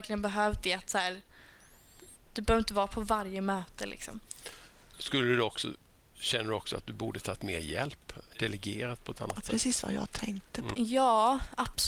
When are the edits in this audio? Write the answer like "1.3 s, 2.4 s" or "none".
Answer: 2.1 s, 10.7 s